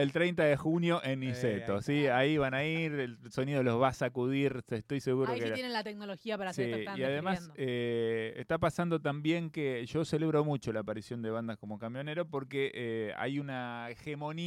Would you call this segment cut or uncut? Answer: uncut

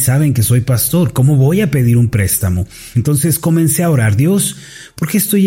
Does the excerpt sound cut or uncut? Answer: cut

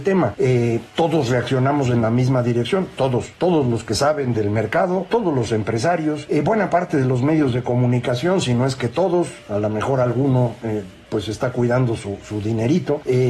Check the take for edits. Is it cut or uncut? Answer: uncut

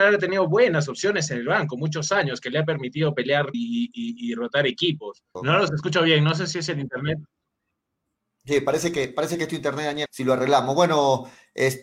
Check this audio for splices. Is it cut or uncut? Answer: cut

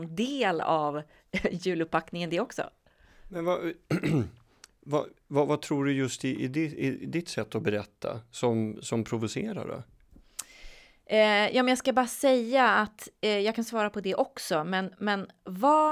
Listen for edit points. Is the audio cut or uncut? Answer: uncut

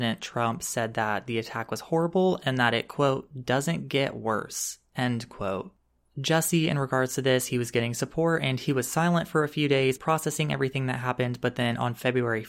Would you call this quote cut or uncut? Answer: cut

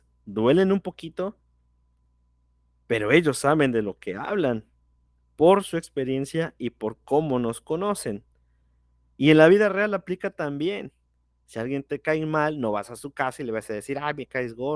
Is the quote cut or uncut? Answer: cut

